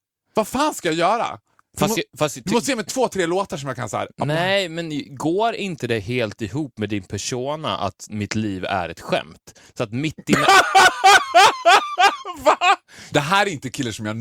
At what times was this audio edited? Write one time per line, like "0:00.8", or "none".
0:13.1